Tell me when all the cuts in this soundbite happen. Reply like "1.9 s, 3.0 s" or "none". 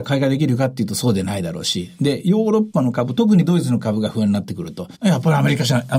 4.9 s